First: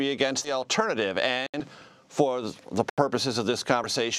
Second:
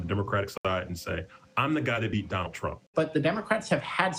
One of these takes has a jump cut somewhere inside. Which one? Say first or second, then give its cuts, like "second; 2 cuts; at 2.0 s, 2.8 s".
second; 1 cut; at 2.9 s